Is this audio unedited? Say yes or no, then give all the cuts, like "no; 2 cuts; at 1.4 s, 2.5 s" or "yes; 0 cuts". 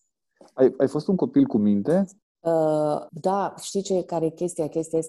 no; 1 cut; at 2.2 s